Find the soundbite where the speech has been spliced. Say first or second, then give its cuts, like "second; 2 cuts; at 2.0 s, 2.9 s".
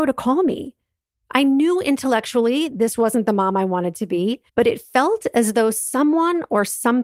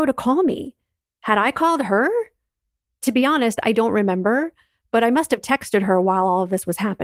first; 2 cuts; at 1.1 s, 4.5 s